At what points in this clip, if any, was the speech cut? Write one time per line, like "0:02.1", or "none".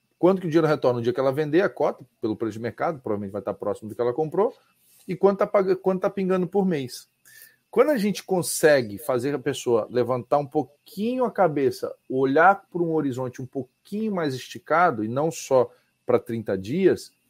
none